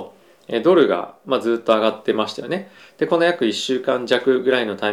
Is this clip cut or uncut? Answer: uncut